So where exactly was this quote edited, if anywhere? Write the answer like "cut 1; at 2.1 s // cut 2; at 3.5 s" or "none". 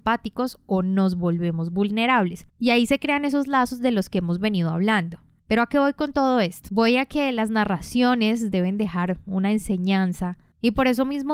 cut 1; at 2.5 s